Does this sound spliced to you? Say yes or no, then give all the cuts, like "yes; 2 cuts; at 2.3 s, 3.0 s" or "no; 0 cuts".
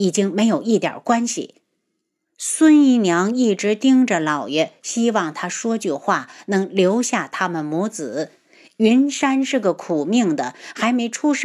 no; 0 cuts